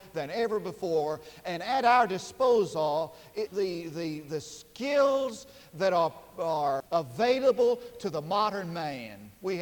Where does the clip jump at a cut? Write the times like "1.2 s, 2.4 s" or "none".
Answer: 3.5 s, 6.8 s